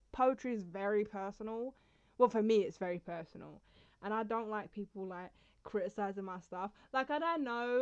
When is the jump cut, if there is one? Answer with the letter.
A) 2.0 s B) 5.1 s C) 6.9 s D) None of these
D